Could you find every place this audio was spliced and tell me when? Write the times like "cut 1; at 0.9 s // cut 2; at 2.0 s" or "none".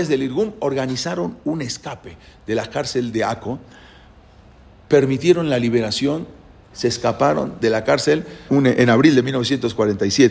cut 1; at 6.7 s // cut 2; at 8.5 s